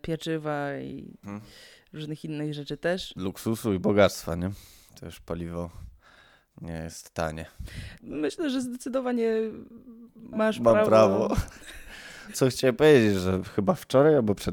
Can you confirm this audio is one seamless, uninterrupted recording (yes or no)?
no